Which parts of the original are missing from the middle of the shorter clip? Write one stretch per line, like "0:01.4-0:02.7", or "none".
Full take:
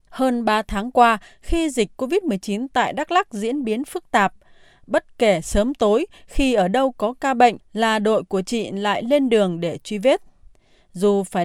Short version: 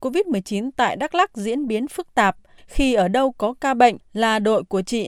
0:04.5-0:06.2